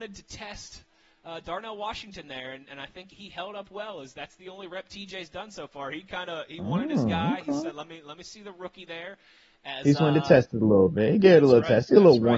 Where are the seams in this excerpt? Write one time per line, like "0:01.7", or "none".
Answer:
0:03.1